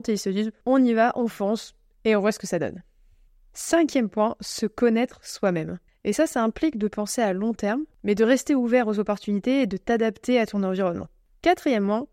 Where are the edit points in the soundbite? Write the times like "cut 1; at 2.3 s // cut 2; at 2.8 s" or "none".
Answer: cut 1; at 5.9 s // cut 2; at 7.9 s